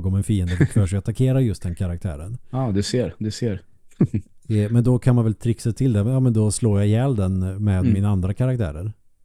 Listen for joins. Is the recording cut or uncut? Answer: uncut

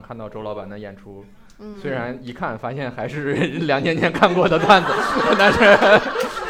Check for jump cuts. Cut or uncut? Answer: uncut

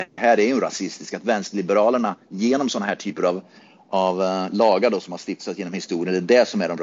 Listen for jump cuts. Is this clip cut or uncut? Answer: uncut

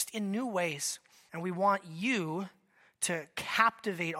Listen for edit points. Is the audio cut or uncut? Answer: cut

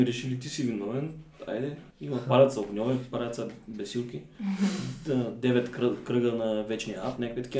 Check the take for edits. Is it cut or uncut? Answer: cut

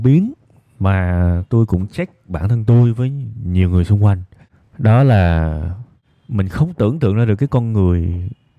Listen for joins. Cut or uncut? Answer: uncut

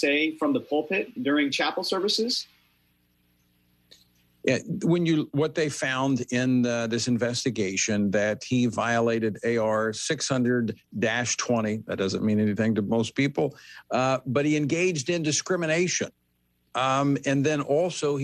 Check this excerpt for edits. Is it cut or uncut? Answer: cut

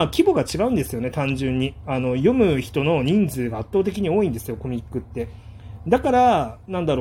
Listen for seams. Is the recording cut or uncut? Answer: uncut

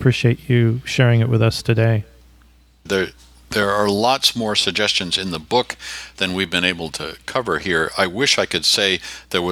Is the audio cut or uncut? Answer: cut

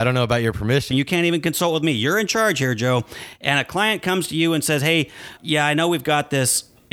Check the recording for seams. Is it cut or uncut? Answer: cut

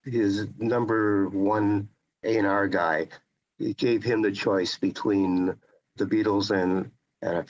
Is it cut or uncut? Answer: uncut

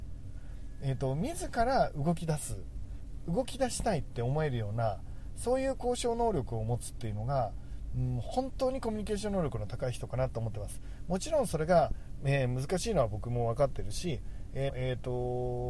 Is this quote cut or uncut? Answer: cut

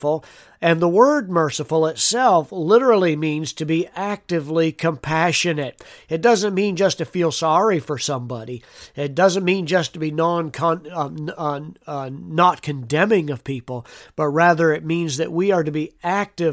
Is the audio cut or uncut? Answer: uncut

